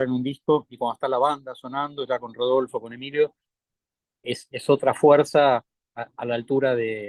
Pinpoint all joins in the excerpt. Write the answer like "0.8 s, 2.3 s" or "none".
none